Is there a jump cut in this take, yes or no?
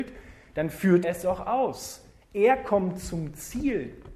yes